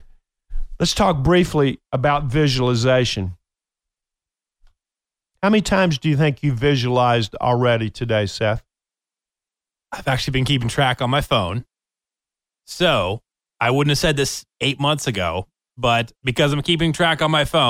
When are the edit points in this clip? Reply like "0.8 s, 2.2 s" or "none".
14.5 s, 16.2 s

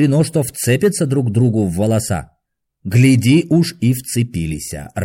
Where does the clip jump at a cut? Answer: none

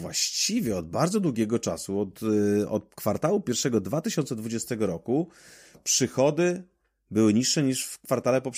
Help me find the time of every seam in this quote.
none

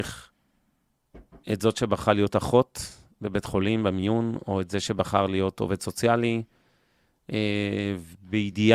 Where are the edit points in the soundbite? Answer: none

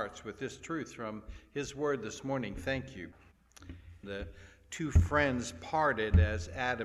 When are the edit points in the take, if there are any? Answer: 4.0 s

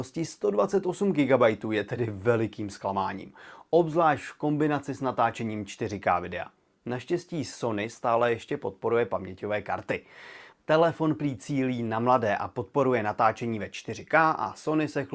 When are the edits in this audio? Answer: 10.5 s

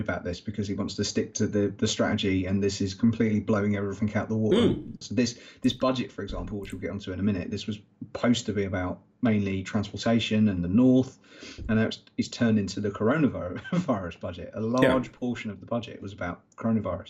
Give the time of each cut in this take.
5.0 s

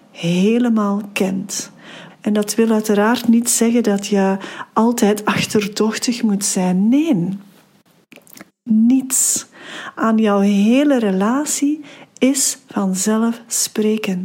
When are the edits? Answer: 2.1 s, 8.5 s

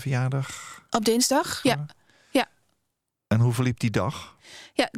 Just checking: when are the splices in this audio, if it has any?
1.6 s

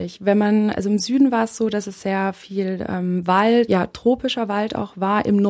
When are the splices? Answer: 3.7 s

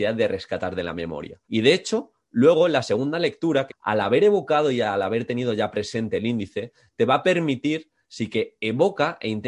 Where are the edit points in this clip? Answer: 1.4 s, 3.7 s, 8.0 s

